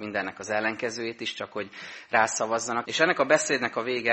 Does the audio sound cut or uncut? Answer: cut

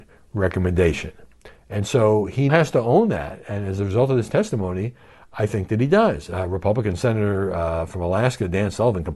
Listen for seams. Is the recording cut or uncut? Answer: cut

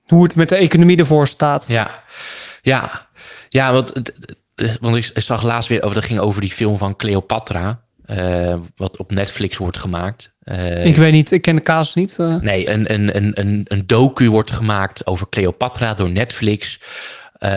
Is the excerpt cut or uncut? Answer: cut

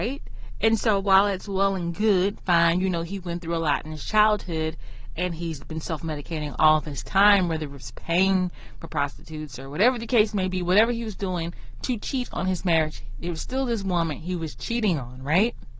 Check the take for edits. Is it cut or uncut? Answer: uncut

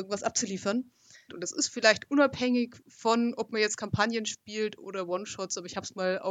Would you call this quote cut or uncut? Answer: cut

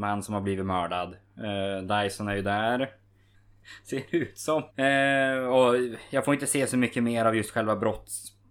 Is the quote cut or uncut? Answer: cut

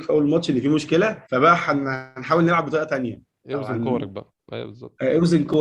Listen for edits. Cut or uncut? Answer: cut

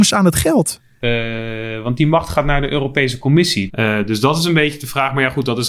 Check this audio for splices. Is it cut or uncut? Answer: cut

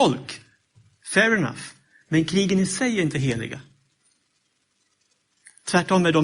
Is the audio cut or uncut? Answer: uncut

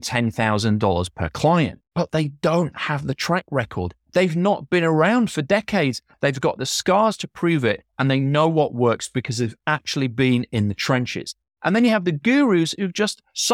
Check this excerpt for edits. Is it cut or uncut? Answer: cut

